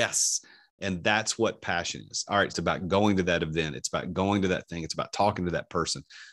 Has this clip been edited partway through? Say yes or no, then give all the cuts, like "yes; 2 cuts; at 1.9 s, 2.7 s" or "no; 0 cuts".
yes; 1 cut; at 2.5 s